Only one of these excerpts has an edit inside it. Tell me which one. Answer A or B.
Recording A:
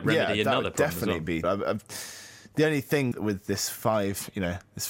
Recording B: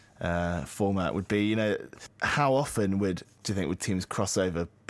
A